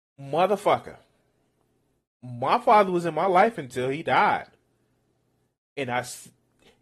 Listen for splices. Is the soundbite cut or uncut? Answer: uncut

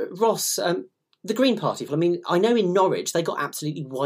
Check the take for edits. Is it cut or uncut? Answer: cut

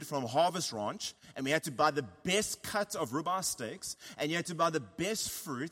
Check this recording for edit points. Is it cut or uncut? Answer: uncut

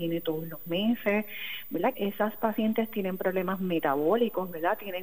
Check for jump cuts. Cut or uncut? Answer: cut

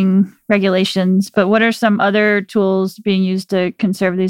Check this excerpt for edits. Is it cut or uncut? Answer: uncut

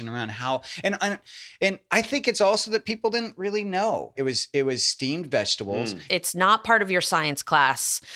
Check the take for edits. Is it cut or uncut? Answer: cut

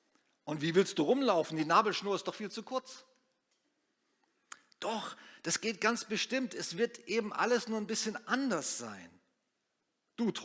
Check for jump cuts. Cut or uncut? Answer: uncut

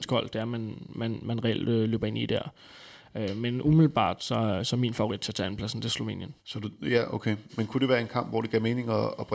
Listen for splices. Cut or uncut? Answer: cut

